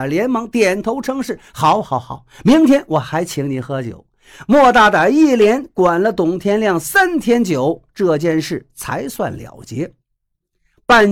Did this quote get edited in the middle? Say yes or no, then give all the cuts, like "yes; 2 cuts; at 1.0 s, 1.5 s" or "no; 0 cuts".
no; 0 cuts